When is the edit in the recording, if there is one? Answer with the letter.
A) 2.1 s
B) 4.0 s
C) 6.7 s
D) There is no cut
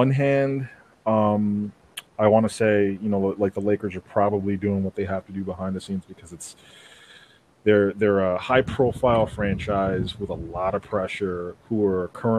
A